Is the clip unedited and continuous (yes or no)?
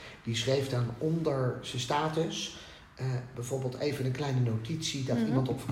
yes